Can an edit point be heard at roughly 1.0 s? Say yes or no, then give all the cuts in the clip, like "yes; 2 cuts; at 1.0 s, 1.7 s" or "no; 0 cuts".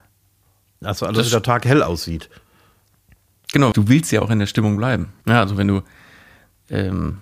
no; 2 cuts; at 3.7 s, 5.2 s